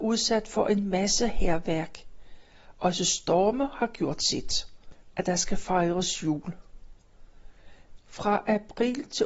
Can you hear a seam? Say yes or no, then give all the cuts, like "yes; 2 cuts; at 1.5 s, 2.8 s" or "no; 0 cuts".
yes; 2 cuts; at 5.1 s, 8.0 s